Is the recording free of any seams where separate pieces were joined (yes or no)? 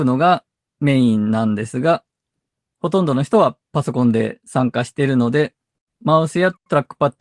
yes